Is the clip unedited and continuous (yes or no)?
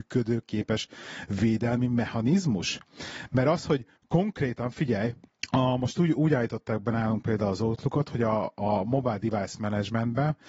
yes